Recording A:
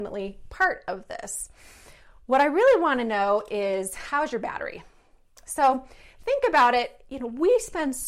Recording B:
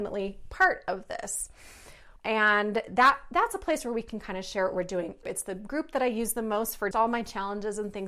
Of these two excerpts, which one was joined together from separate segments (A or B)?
B